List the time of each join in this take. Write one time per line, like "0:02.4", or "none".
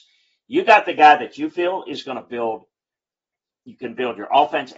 none